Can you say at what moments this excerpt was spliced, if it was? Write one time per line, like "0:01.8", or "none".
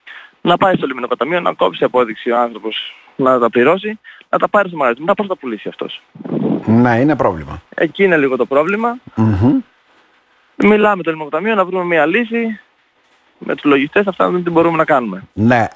none